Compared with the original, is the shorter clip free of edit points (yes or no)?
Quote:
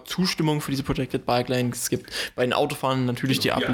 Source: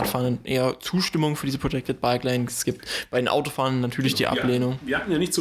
yes